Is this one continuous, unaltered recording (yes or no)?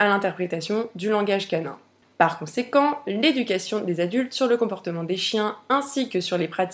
no